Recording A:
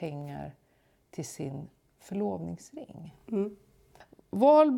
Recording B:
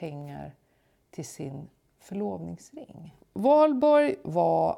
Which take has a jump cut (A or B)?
B